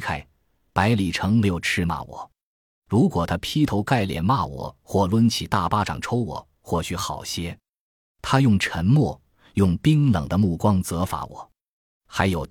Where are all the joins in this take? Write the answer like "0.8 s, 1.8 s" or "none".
8.0 s